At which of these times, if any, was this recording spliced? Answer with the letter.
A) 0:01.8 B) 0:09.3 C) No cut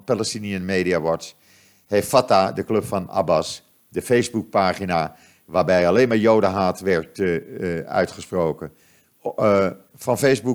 C